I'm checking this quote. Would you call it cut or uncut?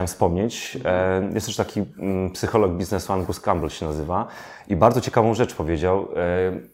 uncut